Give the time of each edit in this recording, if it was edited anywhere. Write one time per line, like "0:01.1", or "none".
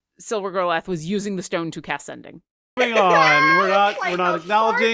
0:02.8

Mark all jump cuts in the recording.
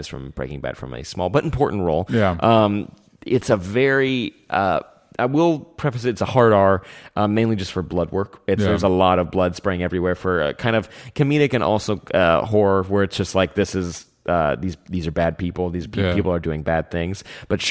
none

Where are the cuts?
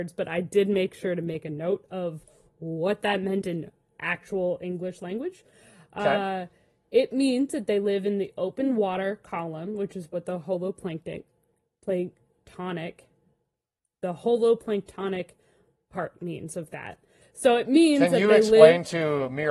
0:17.2

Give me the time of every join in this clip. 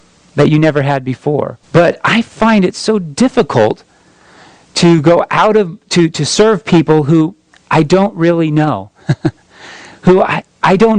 0:01.6

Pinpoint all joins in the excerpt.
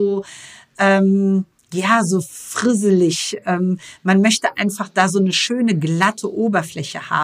none

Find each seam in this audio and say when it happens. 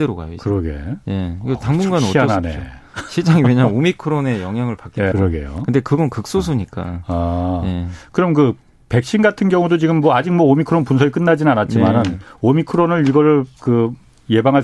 0:05.1

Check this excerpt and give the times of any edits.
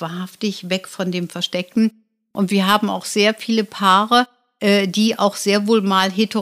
none

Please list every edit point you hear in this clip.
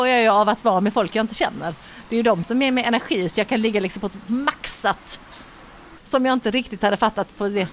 0:06.0

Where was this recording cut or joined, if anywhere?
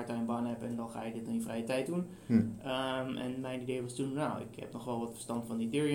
none

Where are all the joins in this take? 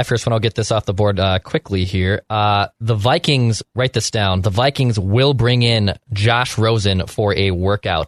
none

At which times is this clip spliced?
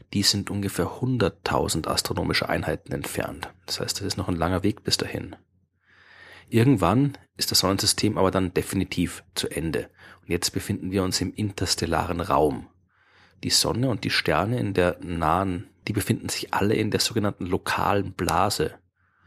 0:15.8

